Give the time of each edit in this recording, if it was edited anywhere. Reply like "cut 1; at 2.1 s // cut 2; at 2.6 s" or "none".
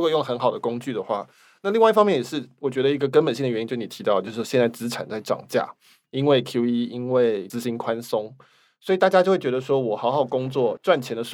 none